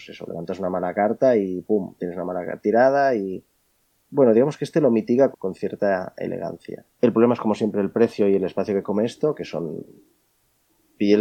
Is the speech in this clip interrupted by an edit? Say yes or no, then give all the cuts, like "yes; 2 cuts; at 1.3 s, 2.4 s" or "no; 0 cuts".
yes; 2 cuts; at 5.3 s, 6.9 s